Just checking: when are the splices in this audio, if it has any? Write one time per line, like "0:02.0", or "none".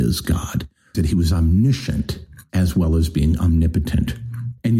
0:00.9